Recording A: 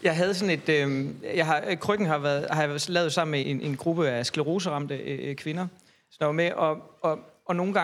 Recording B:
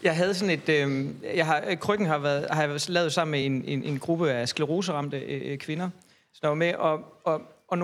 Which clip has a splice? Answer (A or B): A